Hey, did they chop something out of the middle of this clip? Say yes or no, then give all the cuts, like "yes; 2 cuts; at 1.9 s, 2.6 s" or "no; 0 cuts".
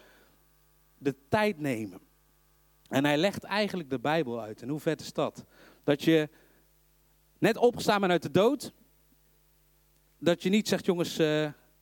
no; 0 cuts